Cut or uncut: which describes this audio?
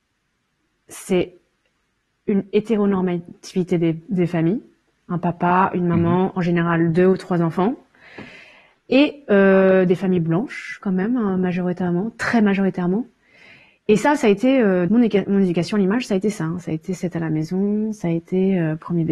cut